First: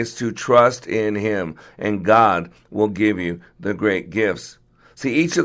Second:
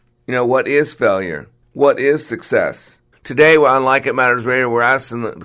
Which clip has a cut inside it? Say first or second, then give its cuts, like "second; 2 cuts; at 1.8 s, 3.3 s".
second; 1 cut; at 3.1 s